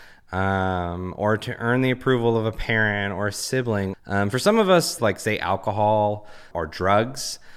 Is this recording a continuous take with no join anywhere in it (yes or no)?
no